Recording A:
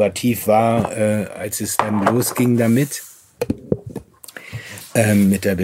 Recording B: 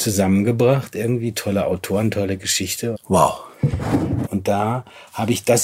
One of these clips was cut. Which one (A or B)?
B